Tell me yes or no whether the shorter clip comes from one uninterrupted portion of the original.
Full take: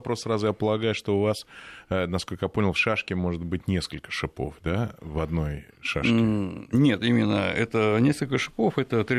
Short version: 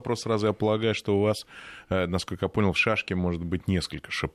yes